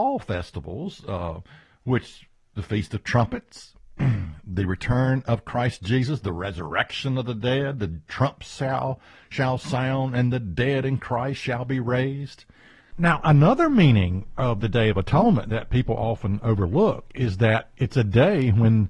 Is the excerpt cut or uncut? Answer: cut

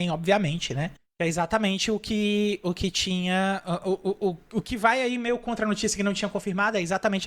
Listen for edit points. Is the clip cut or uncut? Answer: uncut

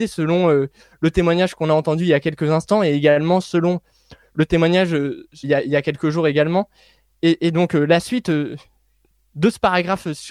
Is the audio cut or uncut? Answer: cut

